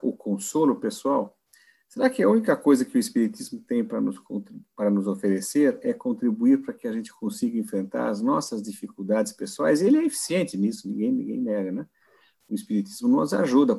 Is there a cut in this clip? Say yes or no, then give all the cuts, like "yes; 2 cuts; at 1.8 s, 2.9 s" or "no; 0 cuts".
no; 0 cuts